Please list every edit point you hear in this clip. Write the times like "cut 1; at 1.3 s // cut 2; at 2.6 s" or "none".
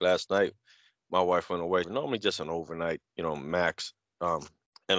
cut 1; at 1.8 s // cut 2; at 3.0 s

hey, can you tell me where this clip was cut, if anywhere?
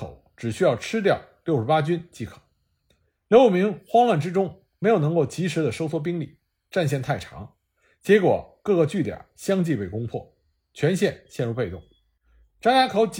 cut 1; at 3.2 s

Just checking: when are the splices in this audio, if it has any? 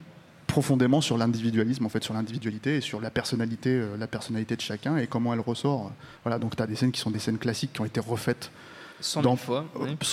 none

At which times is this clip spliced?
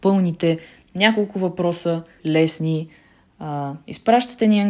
cut 1; at 2.2 s

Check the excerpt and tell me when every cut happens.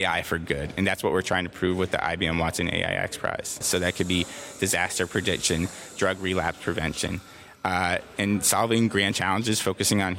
cut 1; at 3.6 s

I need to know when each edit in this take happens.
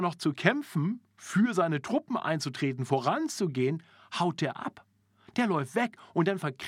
none

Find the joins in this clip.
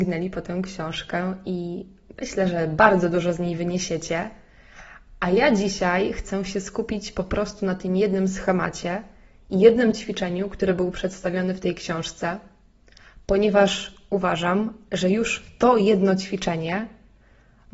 none

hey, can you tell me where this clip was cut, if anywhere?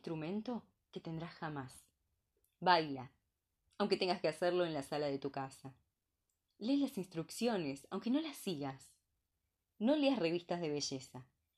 none

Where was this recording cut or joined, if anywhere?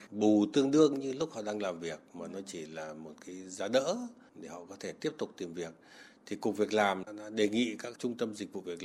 cut 1; at 7.1 s

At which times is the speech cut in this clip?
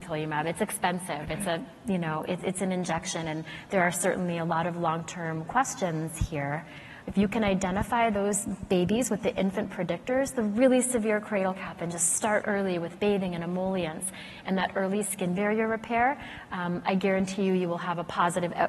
cut 1; at 7.0 s // cut 2; at 12.4 s

